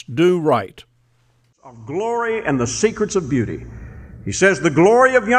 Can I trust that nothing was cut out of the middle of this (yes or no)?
yes